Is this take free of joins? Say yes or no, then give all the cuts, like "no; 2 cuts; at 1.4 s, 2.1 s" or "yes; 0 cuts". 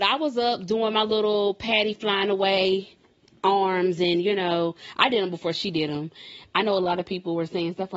yes; 0 cuts